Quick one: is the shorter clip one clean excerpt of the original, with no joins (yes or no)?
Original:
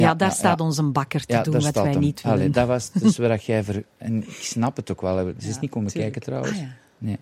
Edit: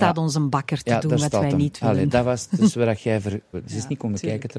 no